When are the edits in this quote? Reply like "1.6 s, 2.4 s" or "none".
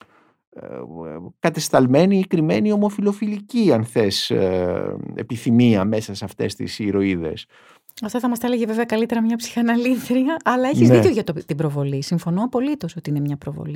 none